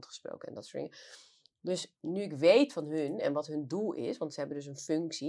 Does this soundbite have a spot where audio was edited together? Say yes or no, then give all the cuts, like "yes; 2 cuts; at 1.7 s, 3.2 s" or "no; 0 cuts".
yes; 1 cut; at 2.0 s